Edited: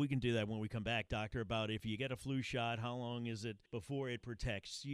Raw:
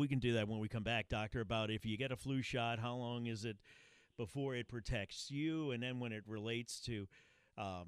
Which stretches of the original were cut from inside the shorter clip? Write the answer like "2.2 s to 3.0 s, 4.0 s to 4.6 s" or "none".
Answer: 3.7 s to 4.1 s